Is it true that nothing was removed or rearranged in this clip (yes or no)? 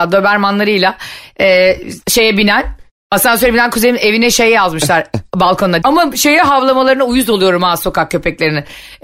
no